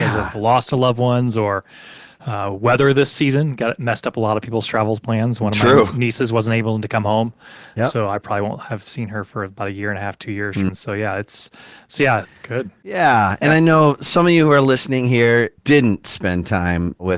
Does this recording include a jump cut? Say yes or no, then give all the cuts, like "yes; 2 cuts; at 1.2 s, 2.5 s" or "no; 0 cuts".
yes; 3 cuts; at 10.7 s, 12.2 s, 15.6 s